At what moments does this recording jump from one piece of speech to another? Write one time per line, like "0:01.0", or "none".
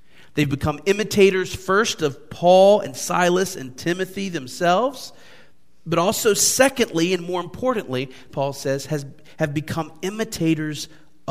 0:08.3